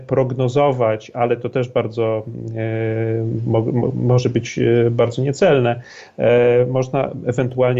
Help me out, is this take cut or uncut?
uncut